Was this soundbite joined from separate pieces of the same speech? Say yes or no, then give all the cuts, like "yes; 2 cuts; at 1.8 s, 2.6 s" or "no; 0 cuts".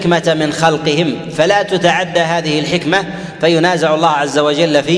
no; 0 cuts